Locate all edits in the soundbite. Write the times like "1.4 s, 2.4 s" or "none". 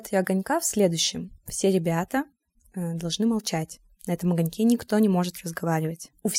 none